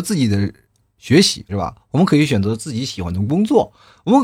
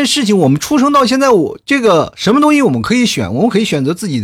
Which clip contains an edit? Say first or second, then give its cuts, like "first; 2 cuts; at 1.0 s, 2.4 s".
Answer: first; 1 cut; at 1.5 s